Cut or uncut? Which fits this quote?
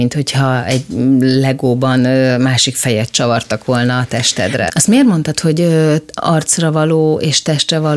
cut